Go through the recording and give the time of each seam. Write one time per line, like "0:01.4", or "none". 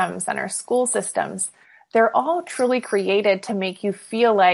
none